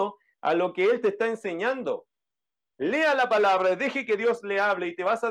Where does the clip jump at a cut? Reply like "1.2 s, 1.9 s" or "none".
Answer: 2.7 s